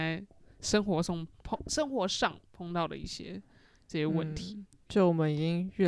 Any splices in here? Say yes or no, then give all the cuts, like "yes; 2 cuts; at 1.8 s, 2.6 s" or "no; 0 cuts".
yes; 1 cut; at 4.7 s